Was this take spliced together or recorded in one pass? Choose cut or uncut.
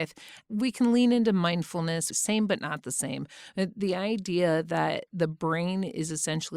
cut